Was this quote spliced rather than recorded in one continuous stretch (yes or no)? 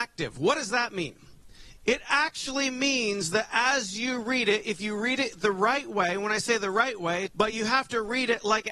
yes